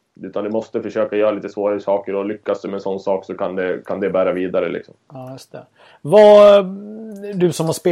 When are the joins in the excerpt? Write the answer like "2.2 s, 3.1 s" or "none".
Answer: none

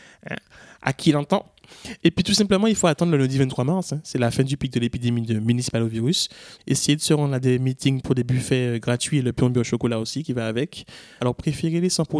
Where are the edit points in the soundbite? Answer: 6.6 s, 11.2 s

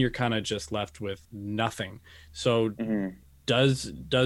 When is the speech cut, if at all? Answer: 1.2 s

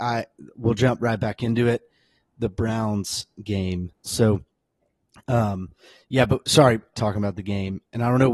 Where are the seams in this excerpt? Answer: 4.1 s, 6.9 s

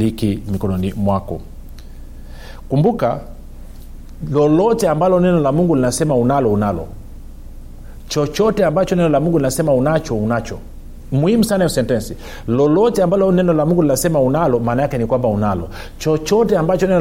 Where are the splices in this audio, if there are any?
none

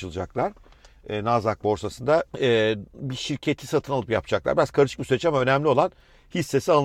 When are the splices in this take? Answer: 2.3 s

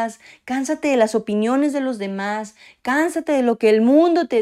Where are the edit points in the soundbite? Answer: none

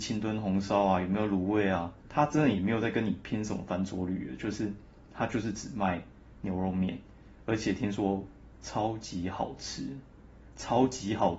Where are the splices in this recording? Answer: 2.0 s

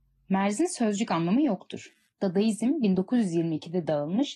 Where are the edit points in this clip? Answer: 2.1 s

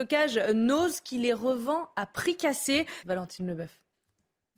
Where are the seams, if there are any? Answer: 3.0 s

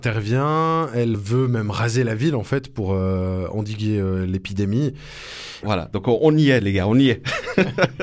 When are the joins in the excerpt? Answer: 1.1 s, 5.6 s

